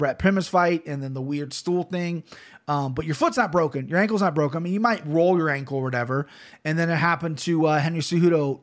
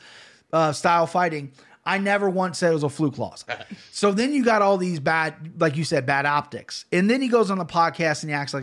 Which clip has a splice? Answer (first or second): second